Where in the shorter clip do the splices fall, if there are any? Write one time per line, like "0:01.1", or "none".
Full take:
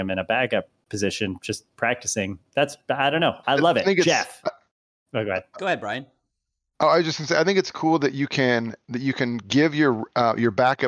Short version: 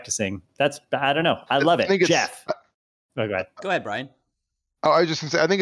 none